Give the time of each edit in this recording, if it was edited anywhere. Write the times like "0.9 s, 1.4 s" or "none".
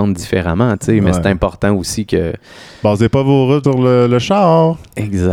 3.6 s